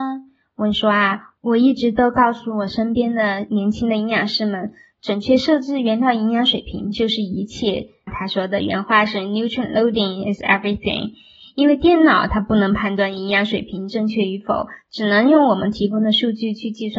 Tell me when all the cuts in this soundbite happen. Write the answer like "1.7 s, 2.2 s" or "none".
none